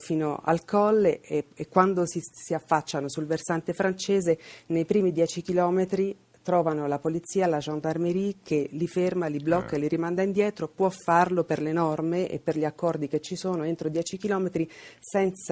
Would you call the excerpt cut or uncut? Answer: uncut